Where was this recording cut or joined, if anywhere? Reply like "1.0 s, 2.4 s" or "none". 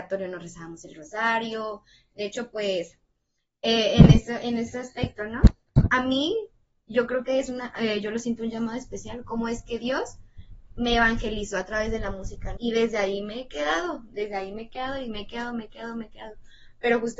12.6 s